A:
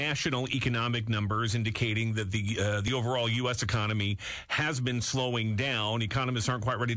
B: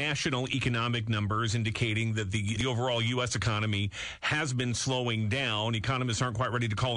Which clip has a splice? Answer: B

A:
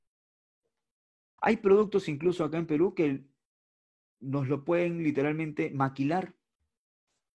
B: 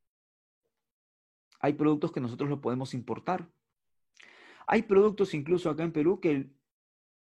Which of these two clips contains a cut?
A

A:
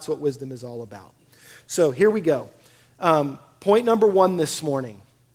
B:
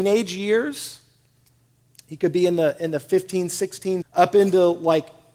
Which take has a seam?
B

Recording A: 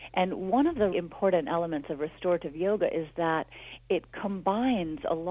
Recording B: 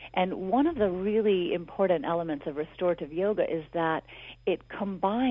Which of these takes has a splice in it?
A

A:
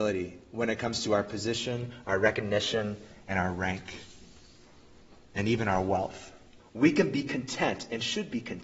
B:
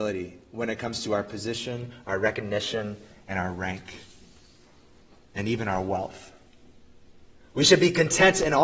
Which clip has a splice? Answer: A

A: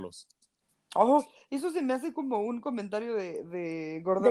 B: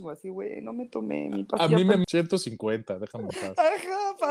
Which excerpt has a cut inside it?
B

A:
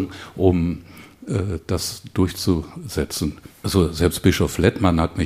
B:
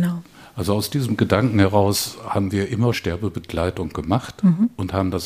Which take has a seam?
B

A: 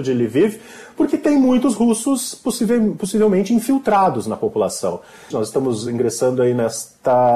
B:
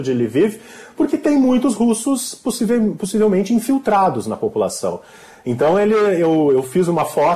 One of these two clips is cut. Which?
A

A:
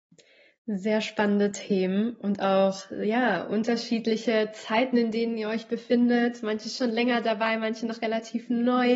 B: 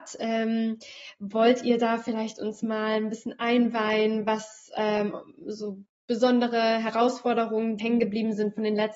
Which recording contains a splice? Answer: B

